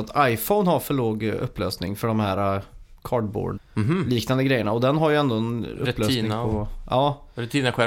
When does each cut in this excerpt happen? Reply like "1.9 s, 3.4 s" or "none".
3.6 s